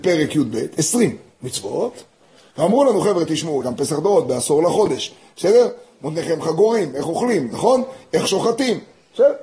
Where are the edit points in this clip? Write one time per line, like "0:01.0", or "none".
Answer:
0:03.6
0:07.5